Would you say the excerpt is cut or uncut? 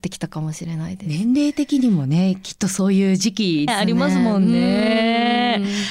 cut